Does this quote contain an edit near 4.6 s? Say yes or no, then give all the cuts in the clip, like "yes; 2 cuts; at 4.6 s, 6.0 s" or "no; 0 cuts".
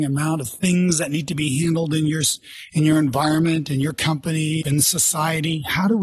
yes; 1 cut; at 4.6 s